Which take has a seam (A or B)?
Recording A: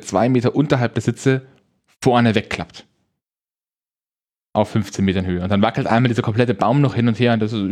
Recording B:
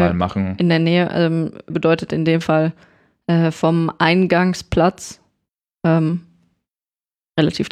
B